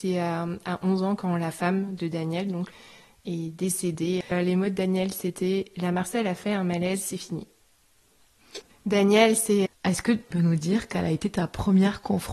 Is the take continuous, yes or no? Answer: no